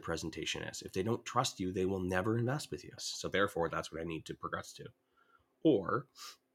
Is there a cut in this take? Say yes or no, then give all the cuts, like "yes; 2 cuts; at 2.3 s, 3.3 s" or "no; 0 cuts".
yes; 1 cut; at 3.0 s